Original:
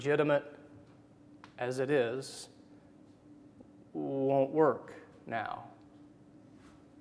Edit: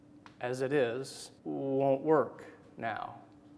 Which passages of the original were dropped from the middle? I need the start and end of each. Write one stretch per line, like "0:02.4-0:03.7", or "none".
0:02.6-0:03.9